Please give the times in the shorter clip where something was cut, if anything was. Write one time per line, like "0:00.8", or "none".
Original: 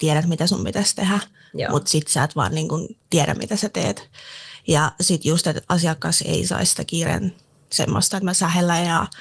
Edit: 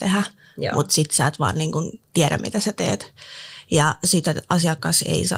0:04.2